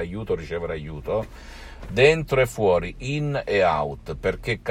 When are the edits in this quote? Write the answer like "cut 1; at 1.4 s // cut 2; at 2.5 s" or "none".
cut 1; at 1.8 s